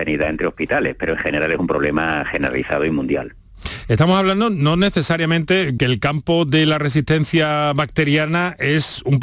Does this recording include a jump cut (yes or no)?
yes